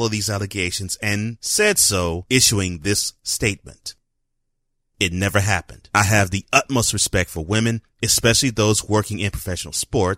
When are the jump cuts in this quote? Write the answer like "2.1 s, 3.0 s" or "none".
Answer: 4.9 s

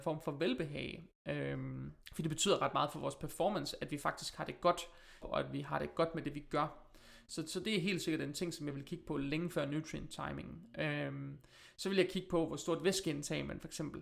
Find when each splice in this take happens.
2.0 s, 5.2 s

